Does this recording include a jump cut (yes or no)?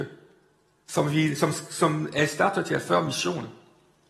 no